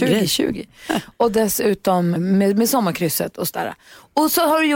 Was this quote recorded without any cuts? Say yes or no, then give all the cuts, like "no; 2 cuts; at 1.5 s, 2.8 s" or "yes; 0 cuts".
no; 1 cut; at 2.2 s